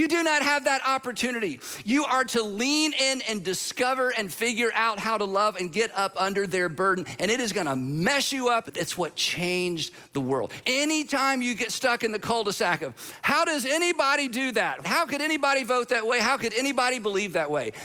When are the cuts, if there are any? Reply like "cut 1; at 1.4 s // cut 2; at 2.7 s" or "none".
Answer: cut 1; at 8.6 s // cut 2; at 10.6 s // cut 3; at 14.8 s